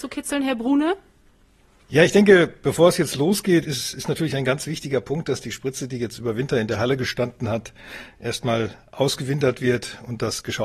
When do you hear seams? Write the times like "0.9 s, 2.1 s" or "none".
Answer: none